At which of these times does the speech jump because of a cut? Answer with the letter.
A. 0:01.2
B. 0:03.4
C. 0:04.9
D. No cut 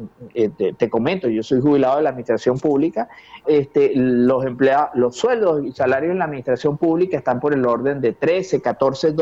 B